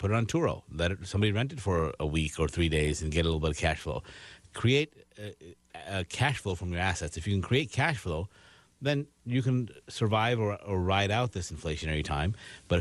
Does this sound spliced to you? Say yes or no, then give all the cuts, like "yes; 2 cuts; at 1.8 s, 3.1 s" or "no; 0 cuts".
no; 0 cuts